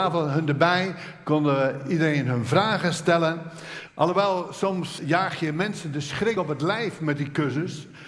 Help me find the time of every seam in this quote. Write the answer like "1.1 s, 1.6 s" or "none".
3.9 s, 5.0 s